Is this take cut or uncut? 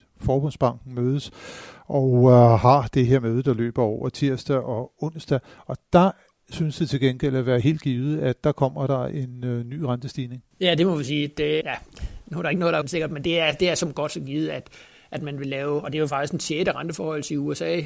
cut